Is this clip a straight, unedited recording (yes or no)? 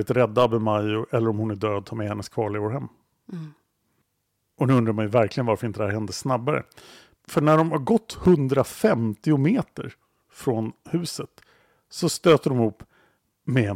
yes